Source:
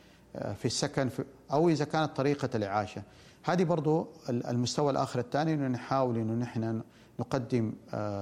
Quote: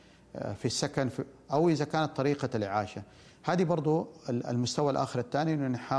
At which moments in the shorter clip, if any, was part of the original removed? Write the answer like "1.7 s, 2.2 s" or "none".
none